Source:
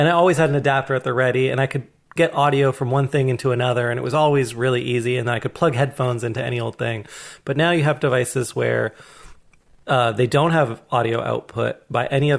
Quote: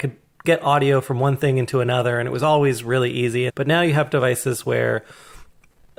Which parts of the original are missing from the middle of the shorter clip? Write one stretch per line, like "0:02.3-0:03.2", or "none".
0:05.2-0:07.4

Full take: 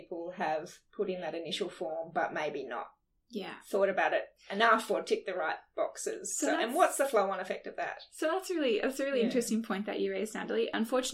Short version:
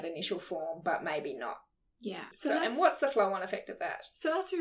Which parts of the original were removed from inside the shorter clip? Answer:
0:03.6-0:06.3

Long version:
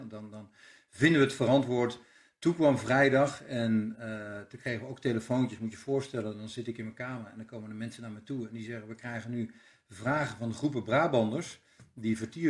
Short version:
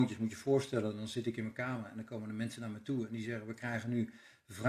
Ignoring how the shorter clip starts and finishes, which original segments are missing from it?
none

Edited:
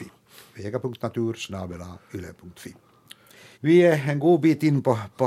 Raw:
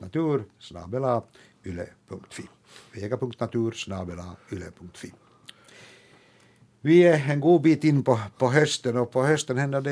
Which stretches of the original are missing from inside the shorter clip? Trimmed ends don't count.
0:05.9-0:06.8

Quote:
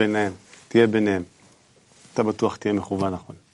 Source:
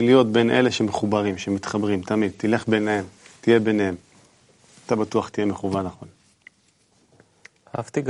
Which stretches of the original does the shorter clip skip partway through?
none

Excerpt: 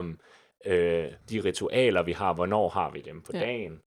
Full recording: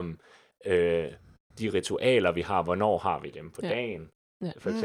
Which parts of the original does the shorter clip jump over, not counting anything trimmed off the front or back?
0:01.2-0:01.5

